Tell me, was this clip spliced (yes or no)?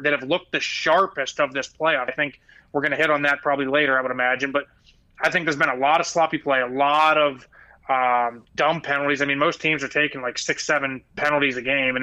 yes